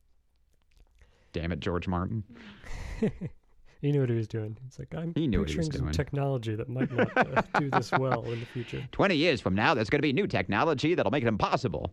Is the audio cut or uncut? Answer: uncut